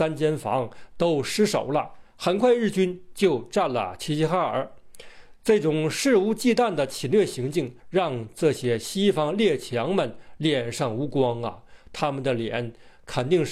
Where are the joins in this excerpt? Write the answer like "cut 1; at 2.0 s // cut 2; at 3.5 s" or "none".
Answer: cut 1; at 7.8 s